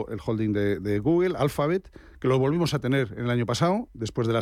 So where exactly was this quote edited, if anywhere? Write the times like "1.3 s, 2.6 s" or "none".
none